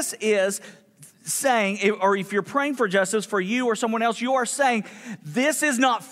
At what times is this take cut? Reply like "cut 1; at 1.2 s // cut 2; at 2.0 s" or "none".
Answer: none